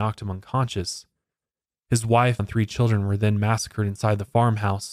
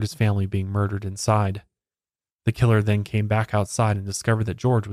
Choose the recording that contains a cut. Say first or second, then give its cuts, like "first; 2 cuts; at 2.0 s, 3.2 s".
first; 1 cut; at 2.4 s